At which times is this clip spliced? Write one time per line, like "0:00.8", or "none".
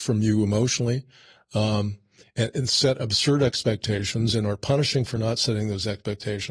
none